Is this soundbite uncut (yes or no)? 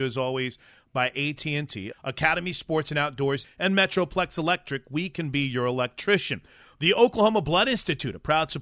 no